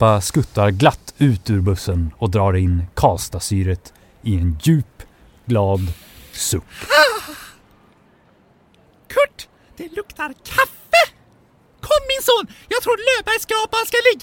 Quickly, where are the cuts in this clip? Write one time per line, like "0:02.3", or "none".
none